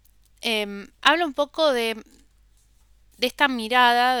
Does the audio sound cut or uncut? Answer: uncut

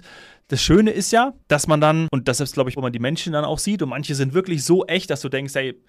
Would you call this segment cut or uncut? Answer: cut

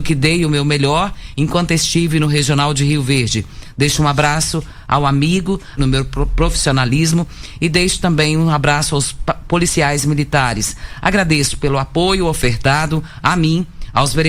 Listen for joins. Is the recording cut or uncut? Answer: cut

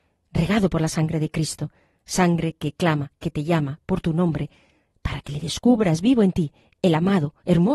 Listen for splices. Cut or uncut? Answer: uncut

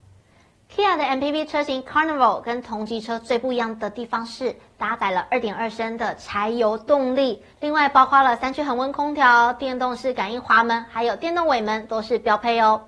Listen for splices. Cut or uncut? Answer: cut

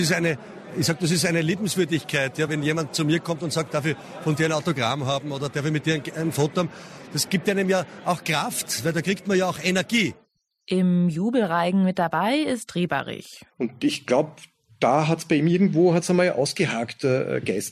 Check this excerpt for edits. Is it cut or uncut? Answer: cut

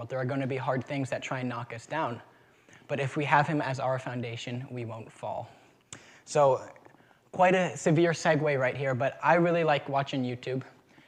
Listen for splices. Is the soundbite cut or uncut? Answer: uncut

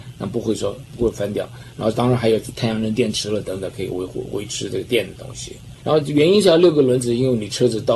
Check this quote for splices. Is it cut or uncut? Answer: cut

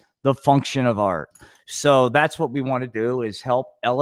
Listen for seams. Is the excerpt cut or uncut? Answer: uncut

